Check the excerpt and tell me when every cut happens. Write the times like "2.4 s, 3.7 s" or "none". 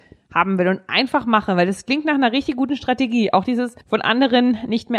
3.8 s

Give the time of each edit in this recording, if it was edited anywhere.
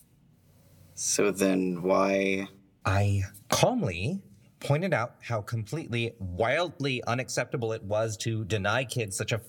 3.4 s

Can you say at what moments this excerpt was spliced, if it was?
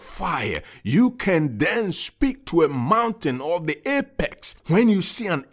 4.6 s

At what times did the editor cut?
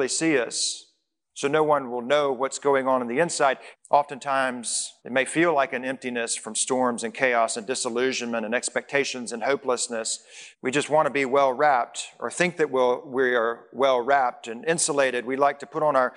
3.7 s, 5.0 s, 10.5 s

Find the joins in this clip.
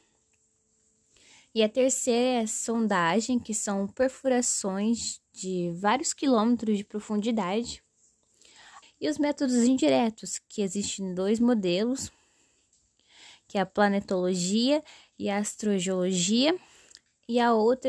8.8 s

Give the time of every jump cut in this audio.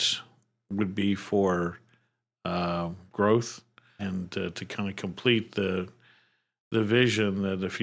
4.0 s

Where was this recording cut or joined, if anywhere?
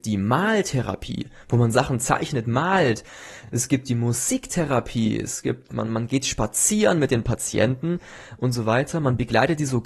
none

